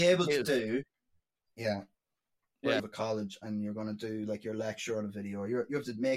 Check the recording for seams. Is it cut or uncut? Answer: cut